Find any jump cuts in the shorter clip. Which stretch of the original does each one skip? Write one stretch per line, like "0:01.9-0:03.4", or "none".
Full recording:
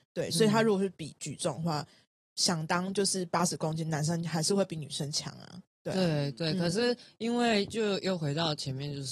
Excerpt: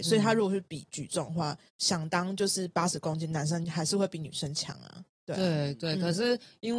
0:02.0-0:02.3